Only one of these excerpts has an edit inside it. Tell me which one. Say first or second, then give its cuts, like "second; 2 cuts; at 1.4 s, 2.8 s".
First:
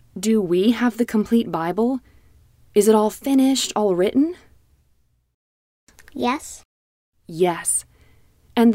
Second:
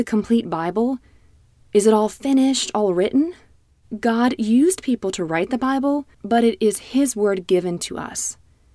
second; 2 cuts; at 3.8 s, 6.1 s